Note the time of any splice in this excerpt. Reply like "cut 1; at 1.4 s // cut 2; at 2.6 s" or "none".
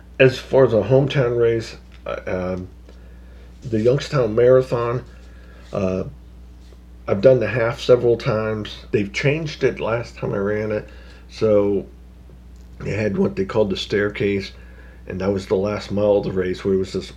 cut 1; at 3.6 s // cut 2; at 8.9 s